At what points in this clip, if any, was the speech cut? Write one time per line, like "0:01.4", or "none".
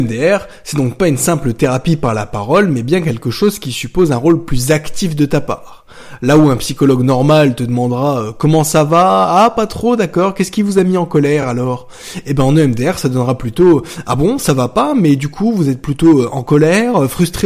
none